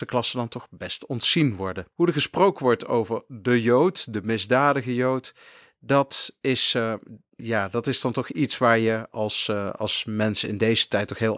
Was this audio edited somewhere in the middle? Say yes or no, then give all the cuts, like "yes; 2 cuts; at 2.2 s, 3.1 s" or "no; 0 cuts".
yes; 1 cut; at 1.9 s